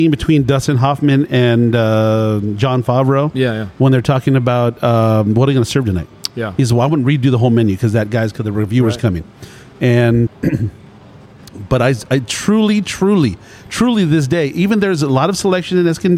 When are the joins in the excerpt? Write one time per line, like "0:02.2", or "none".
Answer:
0:10.3